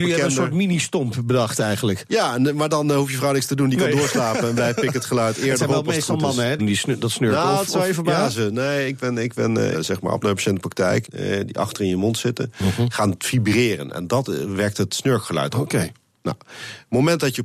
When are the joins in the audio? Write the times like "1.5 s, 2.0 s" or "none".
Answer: 6.6 s, 9.7 s, 11.0 s